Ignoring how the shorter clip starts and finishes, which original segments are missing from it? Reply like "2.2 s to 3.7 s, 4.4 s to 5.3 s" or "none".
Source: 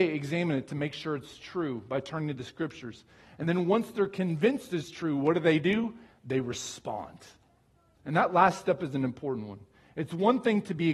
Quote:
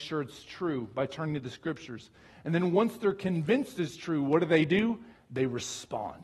none